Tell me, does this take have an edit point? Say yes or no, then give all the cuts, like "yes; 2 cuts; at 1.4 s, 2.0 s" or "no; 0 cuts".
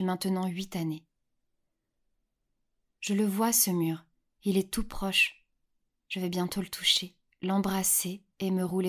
no; 0 cuts